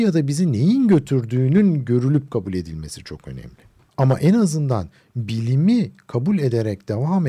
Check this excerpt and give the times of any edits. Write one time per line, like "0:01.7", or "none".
0:03.9